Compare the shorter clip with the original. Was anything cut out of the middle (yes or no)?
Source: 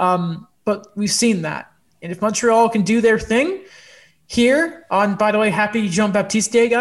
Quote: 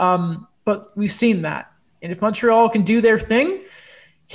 no